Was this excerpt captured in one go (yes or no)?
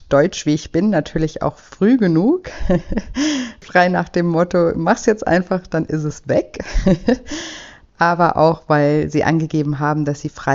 yes